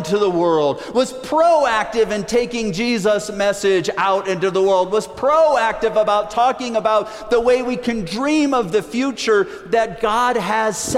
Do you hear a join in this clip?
no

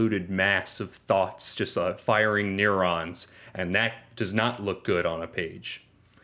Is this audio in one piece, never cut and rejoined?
yes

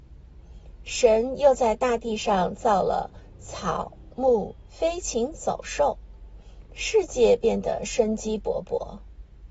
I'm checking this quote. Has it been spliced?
yes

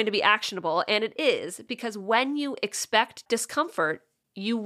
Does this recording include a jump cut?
no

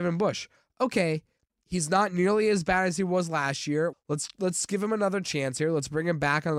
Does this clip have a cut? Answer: yes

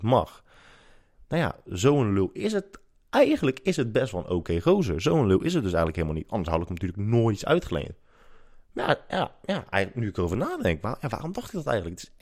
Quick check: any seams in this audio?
yes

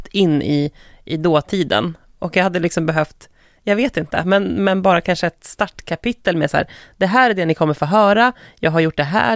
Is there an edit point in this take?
no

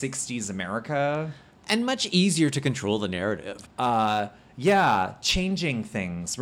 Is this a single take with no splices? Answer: no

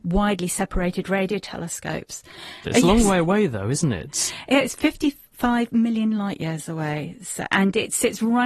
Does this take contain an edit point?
yes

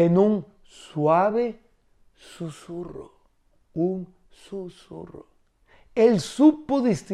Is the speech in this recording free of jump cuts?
yes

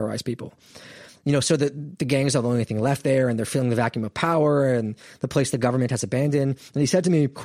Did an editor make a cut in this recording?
yes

